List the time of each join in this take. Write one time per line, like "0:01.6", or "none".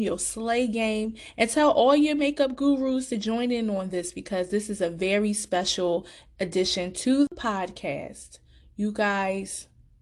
none